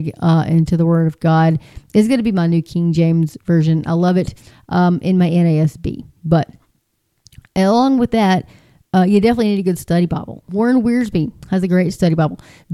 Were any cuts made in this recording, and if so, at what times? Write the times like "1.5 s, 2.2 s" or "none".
10.5 s